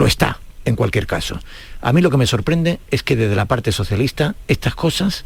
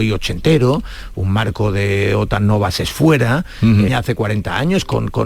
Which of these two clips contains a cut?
second; 1 cut; at 3.9 s

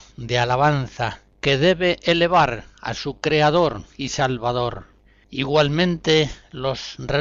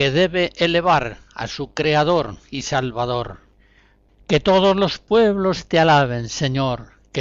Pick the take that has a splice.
first; 1 cut; at 5.2 s

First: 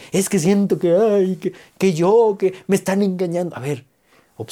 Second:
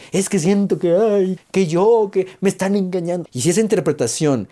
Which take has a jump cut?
second; 2 cuts; at 1.4 s, 3.2 s

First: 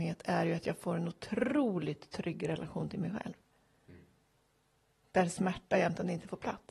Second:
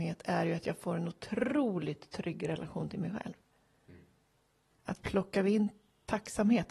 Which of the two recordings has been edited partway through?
second; 1 cut; at 4.7 s

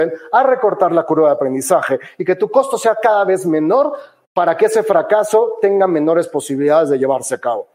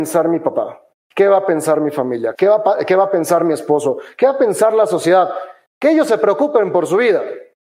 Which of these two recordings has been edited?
second; 2 cuts; at 2.4 s, 5.7 s

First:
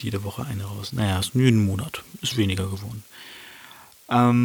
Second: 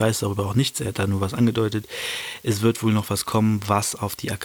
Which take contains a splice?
first; 1 cut; at 2.3 s

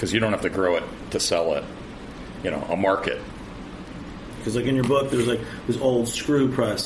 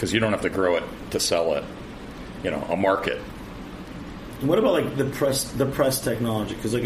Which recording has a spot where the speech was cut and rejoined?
first; 1 cut; at 4.4 s

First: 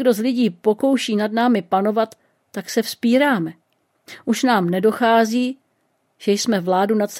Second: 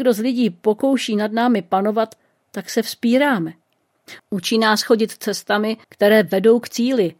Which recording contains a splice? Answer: second; 2 cuts; at 4.2 s, 5.8 s

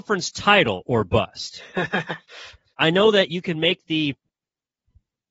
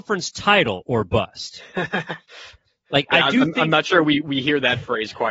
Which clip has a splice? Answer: first; 1 cut; at 2.7 s

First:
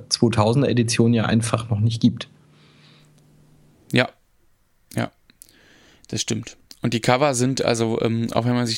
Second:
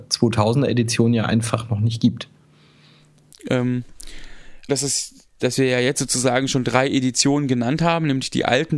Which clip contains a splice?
second; 2 cuts; at 3.3 s, 4.7 s

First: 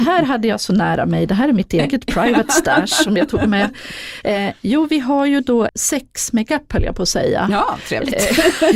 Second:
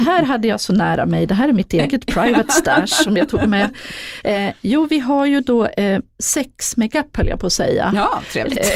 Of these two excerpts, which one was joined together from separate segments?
first; 1 cut; at 5.7 s

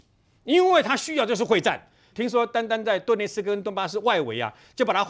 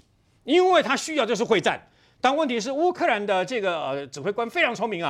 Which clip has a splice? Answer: first; 1 cut; at 2.1 s

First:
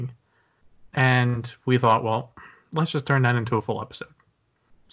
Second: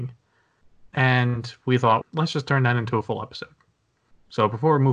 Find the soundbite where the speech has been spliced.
second; 1 cut; at 2.0 s

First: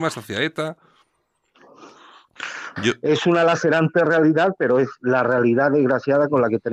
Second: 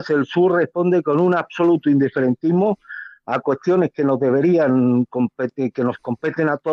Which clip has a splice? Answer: first; 1 cut; at 2.8 s

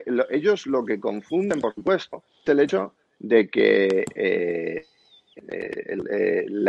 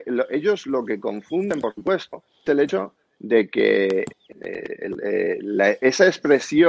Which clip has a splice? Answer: second; 1 cut; at 4.1 s

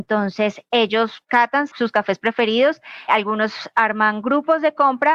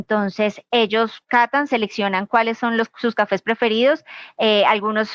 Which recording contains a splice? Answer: first; 2 cuts; at 1.7 s, 3.1 s

